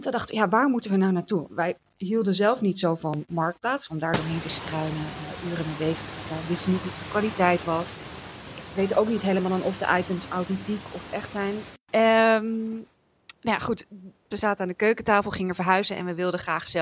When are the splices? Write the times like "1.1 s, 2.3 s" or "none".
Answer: 14.3 s